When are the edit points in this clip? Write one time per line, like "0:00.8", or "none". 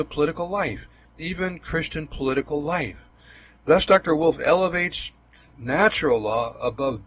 none

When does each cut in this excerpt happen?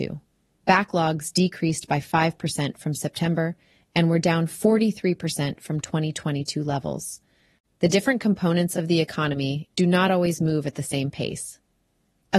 0:07.7
0:09.7

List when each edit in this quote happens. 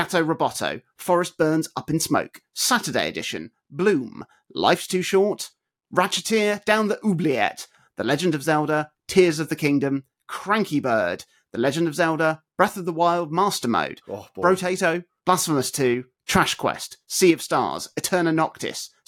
none

